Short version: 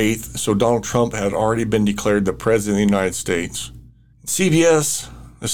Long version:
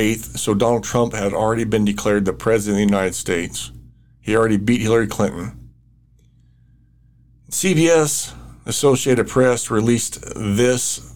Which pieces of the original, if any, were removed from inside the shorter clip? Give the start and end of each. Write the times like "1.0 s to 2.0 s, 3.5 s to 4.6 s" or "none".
4.1 s to 7.4 s